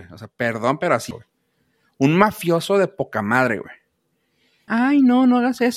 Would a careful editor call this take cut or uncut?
cut